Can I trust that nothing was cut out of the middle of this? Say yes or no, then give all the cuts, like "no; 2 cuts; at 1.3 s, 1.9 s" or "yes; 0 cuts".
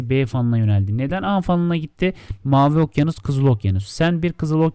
no; 1 cut; at 2.4 s